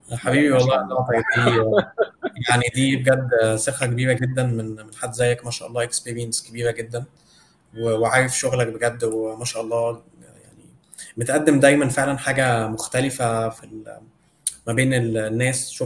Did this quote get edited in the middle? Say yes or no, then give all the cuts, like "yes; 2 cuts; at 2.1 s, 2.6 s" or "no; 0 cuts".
no; 0 cuts